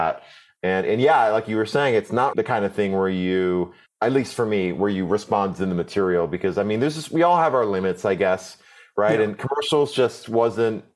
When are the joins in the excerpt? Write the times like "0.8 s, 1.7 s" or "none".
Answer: 2.3 s